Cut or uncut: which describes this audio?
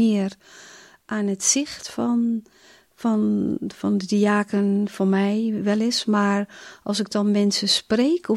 uncut